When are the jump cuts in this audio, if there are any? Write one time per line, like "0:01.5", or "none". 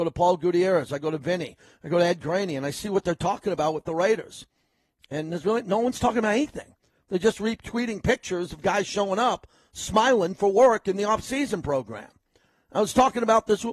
none